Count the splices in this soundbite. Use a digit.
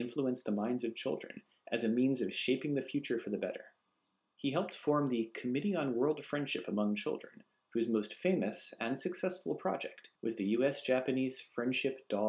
1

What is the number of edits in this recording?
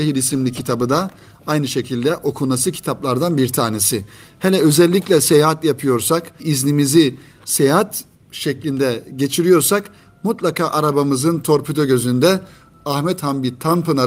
1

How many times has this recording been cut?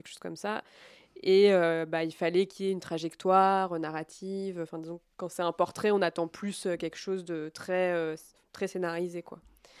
0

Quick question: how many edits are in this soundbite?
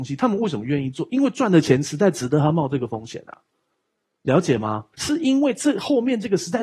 1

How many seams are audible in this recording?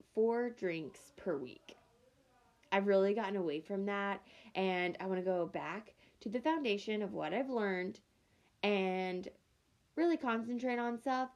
0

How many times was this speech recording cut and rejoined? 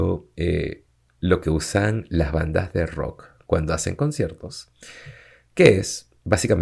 0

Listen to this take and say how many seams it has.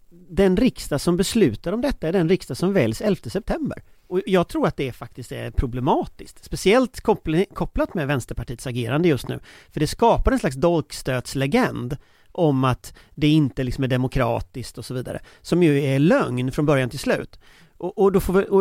1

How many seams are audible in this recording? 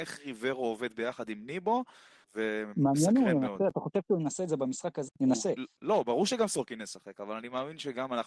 2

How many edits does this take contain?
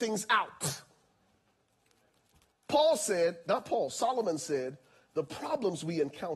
1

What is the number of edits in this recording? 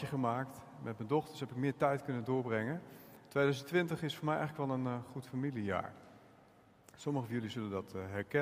0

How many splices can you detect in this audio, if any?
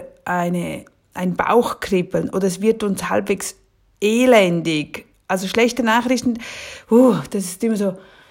0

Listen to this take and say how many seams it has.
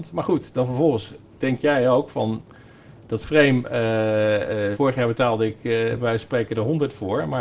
1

